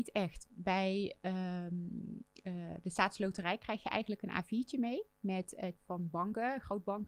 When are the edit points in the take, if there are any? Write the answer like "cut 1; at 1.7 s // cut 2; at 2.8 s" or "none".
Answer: cut 1; at 5.8 s